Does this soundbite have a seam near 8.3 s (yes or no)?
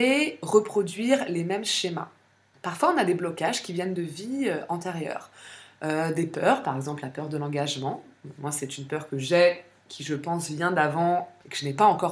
no